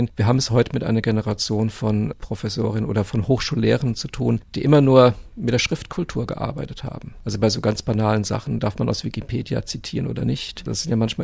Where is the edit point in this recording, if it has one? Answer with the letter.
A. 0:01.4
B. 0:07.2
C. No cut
C